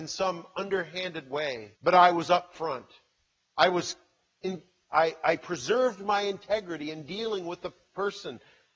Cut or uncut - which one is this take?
cut